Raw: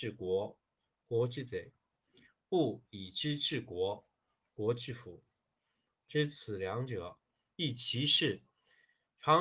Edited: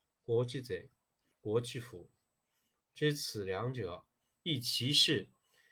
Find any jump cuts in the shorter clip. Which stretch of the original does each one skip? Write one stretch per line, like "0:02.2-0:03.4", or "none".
0:02.1-0:04.4